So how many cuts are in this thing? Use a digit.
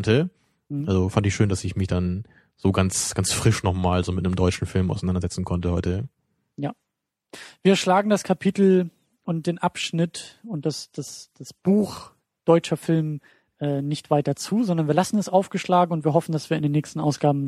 0